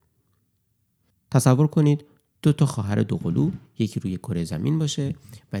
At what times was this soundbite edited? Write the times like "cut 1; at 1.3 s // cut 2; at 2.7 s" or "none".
cut 1; at 1.1 s